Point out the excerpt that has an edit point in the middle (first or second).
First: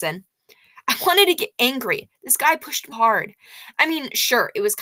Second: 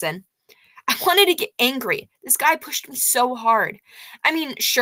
first